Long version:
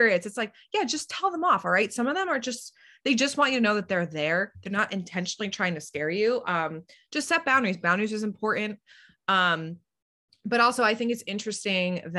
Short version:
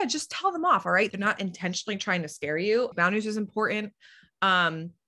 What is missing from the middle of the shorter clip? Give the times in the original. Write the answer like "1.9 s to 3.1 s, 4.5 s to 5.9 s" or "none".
1.9 s to 4.6 s, 6.4 s to 7.8 s